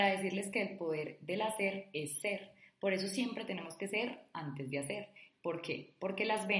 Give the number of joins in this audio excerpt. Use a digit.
1